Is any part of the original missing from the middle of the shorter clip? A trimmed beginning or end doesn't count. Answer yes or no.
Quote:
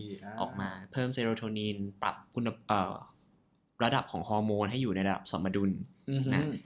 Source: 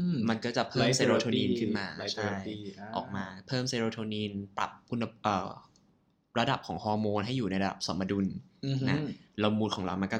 no